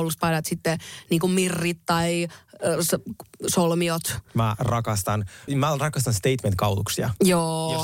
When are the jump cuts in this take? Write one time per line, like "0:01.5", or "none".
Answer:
0:04.3
0:05.5